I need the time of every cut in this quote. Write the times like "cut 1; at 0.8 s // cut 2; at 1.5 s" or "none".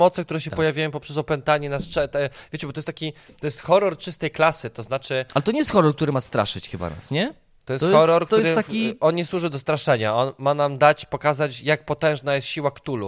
cut 1; at 7.6 s